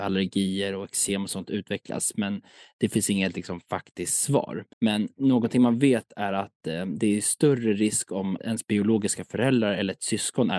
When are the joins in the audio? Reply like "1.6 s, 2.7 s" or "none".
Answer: 4.7 s, 8.4 s